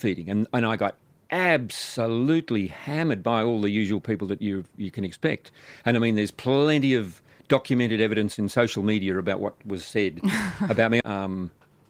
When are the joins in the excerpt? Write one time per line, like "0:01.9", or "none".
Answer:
0:11.0